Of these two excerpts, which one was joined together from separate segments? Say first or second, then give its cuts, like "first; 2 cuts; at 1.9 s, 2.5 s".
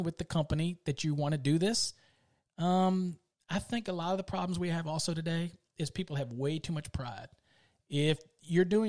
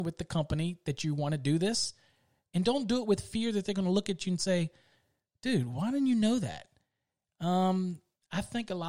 first; 1 cut; at 2.5 s